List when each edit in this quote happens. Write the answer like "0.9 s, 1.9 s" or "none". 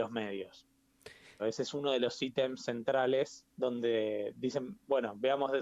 1.4 s, 3.5 s